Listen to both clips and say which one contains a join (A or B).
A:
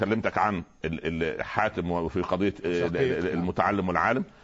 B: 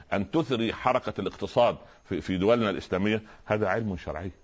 B